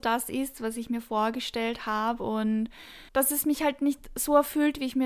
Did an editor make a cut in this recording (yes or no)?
yes